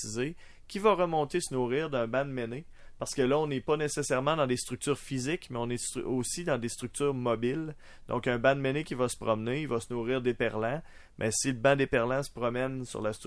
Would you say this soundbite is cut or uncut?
uncut